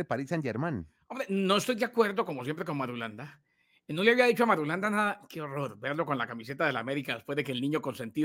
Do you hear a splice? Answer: no; 0 cuts

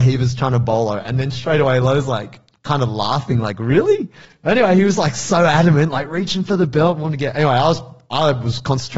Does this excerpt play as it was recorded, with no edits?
no; 1 cut; at 4.2 s

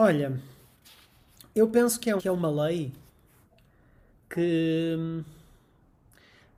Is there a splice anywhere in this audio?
yes; 1 cut; at 2.2 s

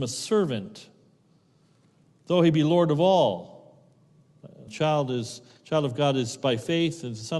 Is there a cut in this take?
yes; 1 cut; at 4.7 s

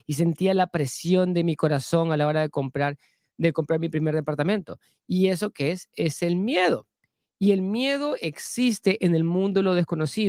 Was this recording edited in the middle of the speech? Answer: no; 0 cuts

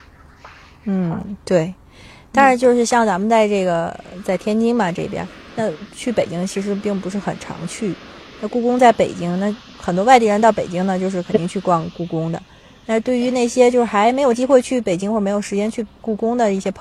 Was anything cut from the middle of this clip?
no; 0 cuts

